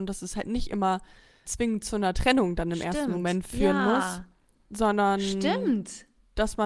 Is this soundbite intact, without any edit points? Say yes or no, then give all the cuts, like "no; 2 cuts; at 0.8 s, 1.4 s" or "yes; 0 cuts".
no; 1 cut; at 1.4 s